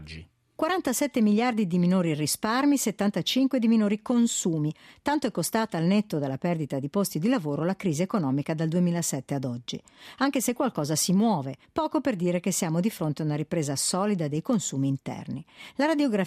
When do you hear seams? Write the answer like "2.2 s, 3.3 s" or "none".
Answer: 11.6 s